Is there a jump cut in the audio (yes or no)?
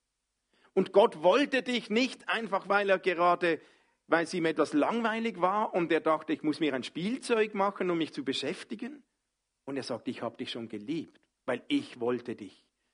yes